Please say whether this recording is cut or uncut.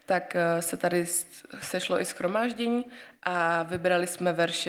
uncut